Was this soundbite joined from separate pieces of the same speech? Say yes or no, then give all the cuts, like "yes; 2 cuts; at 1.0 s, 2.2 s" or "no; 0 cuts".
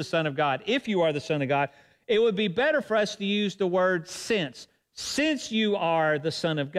no; 0 cuts